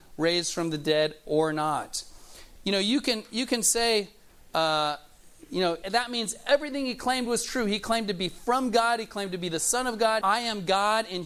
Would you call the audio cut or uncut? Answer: cut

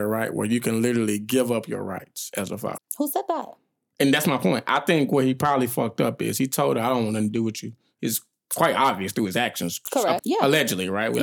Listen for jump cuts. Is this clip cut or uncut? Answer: cut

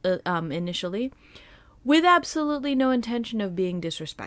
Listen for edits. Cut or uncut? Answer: uncut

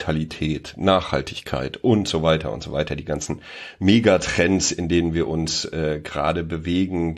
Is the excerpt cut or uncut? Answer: uncut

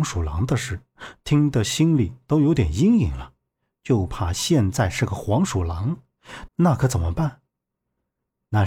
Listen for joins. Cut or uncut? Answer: cut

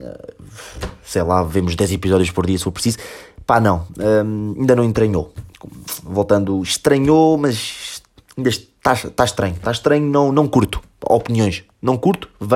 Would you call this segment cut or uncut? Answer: uncut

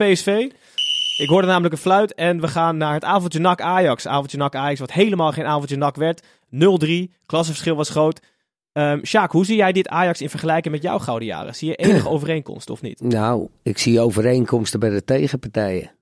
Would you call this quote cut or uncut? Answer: uncut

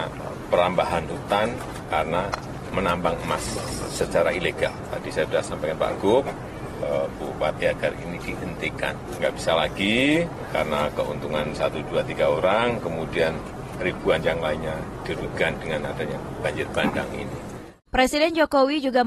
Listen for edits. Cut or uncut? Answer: uncut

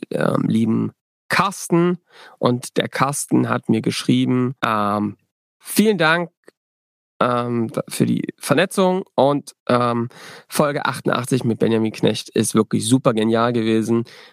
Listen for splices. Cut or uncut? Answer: cut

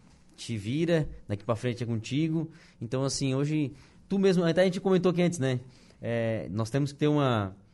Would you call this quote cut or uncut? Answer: uncut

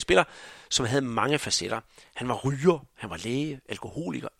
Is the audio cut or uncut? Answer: uncut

